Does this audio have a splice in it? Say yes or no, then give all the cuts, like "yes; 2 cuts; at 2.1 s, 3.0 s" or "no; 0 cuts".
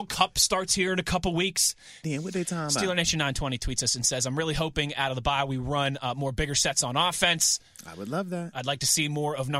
yes; 1 cut; at 2.0 s